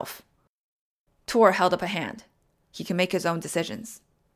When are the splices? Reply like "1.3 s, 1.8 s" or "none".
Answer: 1.1 s, 2.6 s